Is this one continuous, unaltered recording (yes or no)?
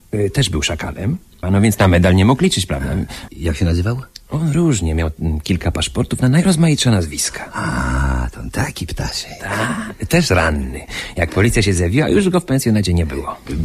no